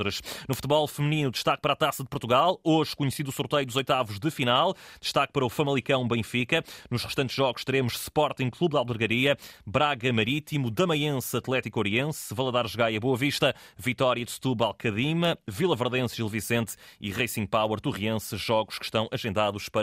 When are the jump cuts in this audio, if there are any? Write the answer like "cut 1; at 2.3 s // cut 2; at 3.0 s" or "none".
none